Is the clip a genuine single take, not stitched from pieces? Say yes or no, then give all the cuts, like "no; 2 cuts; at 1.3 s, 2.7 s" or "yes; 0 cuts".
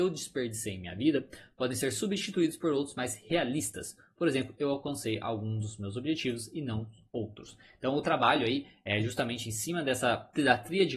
yes; 0 cuts